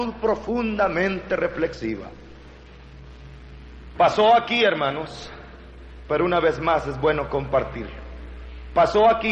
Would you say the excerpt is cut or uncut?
cut